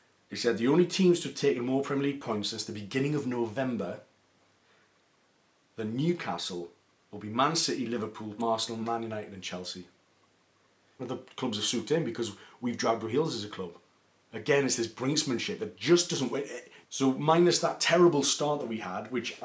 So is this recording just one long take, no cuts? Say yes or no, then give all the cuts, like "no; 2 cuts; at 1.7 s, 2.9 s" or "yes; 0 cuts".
no; 3 cuts; at 8.4 s, 11.0 s, 16.8 s